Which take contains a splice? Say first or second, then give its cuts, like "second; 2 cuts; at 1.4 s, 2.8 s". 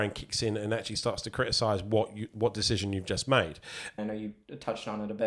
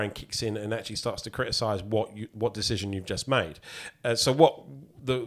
first; 1 cut; at 4.0 s